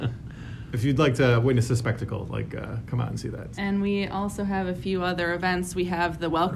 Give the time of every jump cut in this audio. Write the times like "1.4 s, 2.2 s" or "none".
3.5 s